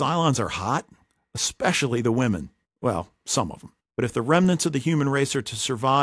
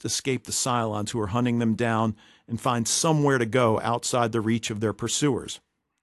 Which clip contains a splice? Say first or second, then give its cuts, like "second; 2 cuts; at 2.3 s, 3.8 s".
first; 2 cuts; at 2.6 s, 3.8 s